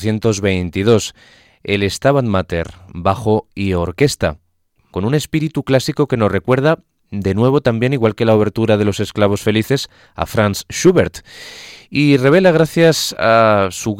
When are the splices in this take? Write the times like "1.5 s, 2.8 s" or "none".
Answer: 2.9 s